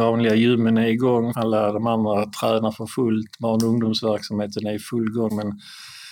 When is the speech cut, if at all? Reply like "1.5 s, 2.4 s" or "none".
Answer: 1.3 s